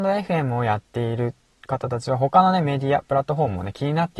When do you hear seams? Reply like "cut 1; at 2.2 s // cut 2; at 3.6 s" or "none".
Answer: none